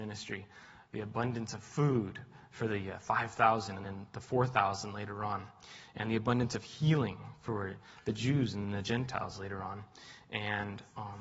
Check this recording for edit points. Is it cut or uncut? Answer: uncut